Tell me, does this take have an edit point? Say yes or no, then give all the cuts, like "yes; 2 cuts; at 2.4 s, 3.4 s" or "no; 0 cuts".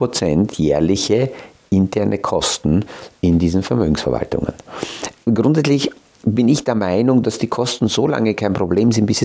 no; 0 cuts